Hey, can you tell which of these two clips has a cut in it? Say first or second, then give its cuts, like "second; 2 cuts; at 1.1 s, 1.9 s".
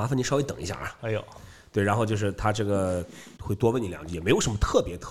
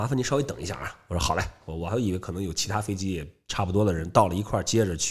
first; 2 cuts; at 1.0 s, 3.4 s